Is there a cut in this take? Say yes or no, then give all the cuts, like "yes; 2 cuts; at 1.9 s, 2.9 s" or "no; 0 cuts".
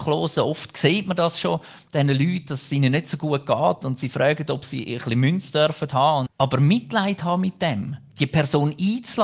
yes; 2 cuts; at 6.3 s, 8.1 s